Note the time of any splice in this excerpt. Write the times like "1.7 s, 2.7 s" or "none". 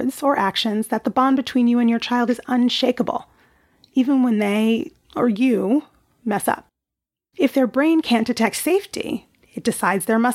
7.3 s